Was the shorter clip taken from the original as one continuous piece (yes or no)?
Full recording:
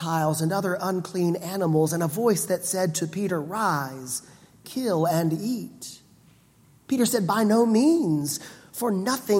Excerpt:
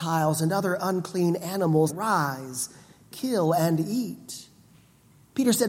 no